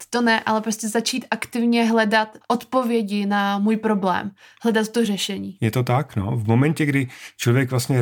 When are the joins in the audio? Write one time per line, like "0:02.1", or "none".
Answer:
0:02.4